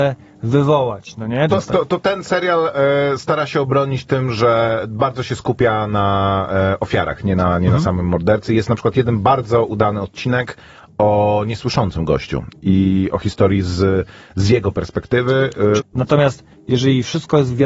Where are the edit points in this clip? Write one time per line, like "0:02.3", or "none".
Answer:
0:01.5
0:15.8